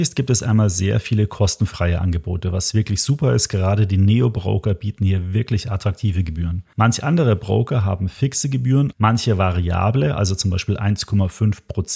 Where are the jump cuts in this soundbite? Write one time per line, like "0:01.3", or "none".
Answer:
0:08.9